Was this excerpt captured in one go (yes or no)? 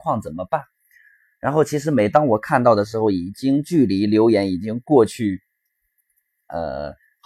yes